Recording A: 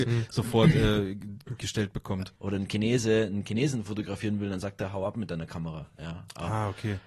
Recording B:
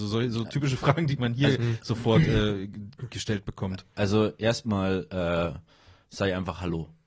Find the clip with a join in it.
A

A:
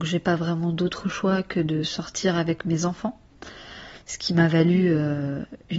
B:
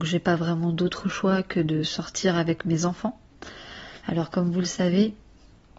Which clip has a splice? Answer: B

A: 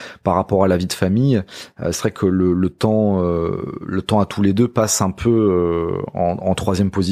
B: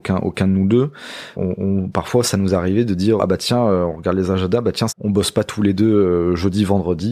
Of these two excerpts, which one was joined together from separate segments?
B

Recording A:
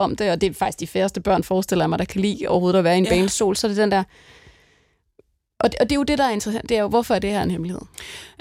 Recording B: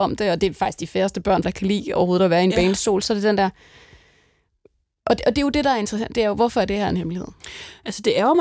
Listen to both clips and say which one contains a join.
B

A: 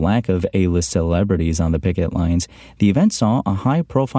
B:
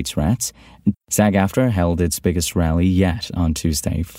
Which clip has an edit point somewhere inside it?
B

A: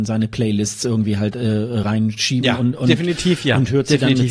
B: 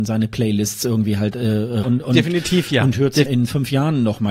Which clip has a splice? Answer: B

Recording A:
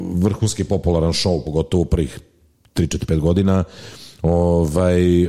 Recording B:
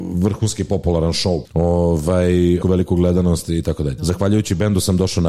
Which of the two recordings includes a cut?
B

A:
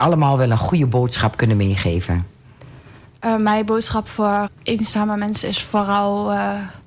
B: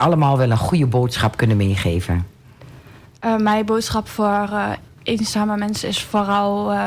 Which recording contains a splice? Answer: A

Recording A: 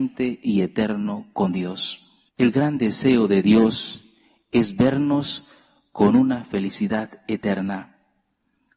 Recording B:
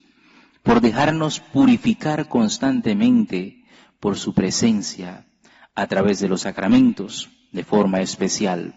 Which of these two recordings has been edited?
A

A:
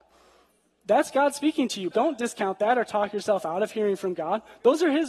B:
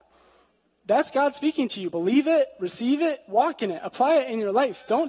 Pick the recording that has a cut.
A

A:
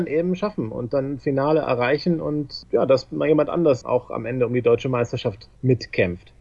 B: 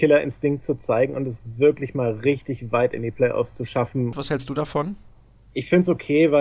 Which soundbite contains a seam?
B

